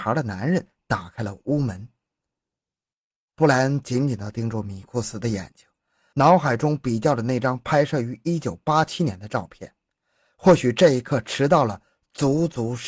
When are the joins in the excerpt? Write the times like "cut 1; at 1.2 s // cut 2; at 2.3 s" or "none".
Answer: none